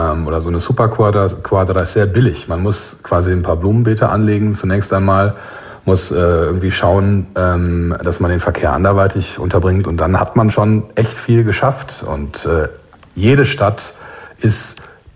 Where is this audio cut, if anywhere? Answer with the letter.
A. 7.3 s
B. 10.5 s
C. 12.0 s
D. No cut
D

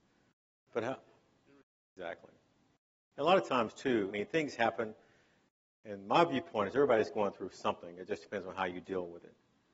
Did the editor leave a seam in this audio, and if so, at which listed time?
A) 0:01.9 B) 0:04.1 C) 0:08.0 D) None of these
B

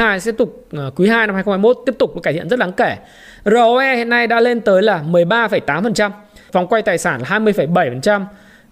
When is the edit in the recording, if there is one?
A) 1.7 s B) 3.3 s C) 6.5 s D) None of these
C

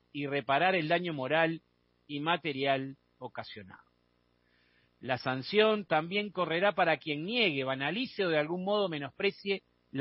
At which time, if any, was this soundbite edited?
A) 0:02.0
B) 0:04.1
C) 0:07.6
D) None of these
D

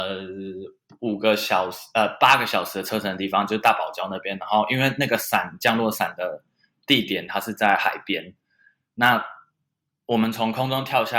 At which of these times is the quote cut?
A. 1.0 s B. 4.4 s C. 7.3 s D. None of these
C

